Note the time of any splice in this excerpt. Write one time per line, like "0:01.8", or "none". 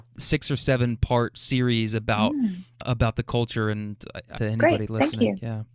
0:04.4